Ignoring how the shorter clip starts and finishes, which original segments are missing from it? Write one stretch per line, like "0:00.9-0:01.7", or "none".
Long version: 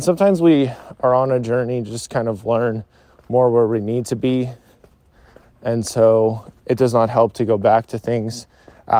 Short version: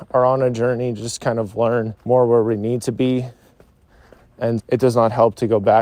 0:02.9-0:03.2
0:05.8-0:06.6